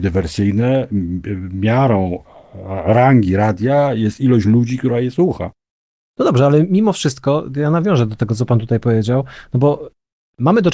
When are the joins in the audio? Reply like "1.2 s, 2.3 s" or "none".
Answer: none